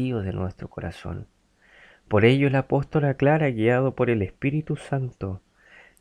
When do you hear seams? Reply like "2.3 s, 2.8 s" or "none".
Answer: none